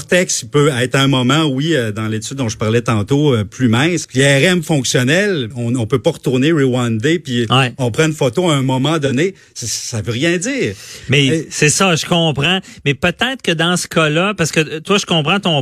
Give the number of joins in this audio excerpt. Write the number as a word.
two